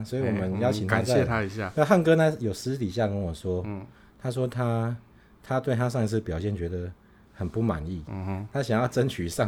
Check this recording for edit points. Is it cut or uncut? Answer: uncut